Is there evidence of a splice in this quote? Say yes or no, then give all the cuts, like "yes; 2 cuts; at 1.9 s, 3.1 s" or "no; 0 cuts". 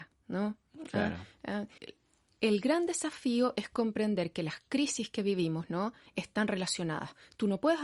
yes; 1 cut; at 1.8 s